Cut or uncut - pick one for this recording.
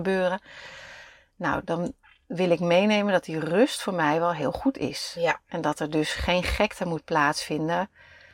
uncut